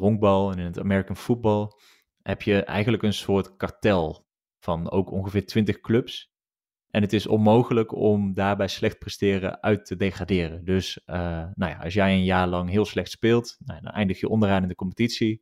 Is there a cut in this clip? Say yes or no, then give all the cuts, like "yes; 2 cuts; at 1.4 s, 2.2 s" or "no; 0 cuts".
no; 0 cuts